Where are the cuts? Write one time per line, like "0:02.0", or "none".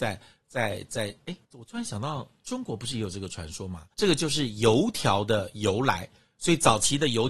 0:01.4
0:03.9